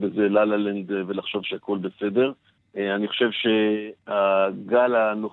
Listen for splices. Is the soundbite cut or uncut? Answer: cut